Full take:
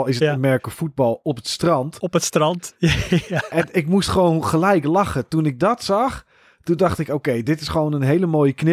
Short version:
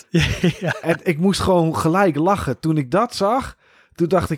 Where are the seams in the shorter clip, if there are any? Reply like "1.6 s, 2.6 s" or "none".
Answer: none